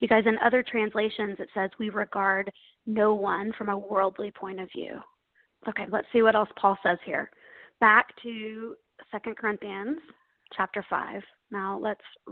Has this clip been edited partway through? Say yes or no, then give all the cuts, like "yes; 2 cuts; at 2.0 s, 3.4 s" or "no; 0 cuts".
yes; 1 cut; at 5.5 s